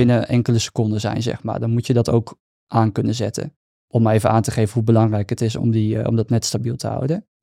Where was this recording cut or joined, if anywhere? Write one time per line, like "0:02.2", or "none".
none